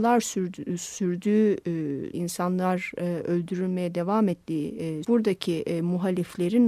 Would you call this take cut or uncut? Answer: cut